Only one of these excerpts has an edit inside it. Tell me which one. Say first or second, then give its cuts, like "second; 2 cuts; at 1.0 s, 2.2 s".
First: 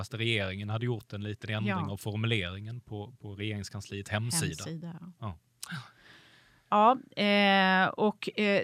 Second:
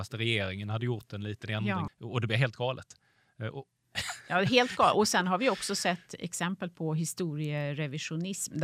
second; 1 cut; at 1.9 s